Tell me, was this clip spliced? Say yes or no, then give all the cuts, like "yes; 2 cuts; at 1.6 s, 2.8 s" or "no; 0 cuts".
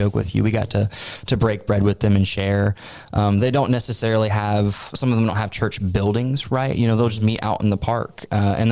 no; 0 cuts